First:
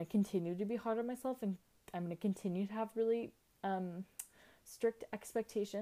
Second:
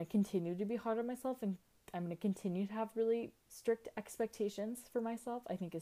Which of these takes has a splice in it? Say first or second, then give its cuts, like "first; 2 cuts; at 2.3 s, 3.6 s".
second; 1 cut; at 3.5 s